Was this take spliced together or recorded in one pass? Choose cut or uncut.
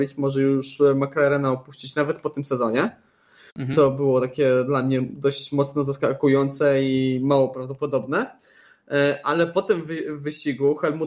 uncut